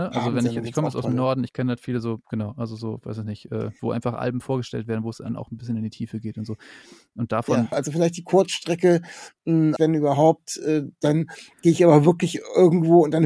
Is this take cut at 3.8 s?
yes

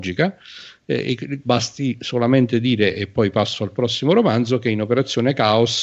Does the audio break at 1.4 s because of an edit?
yes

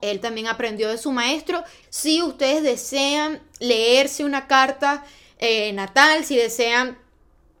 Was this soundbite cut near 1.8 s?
yes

